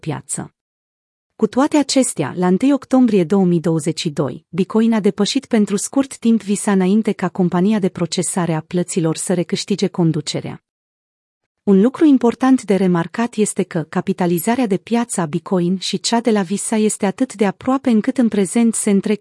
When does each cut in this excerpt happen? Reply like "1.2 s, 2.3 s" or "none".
11.5 s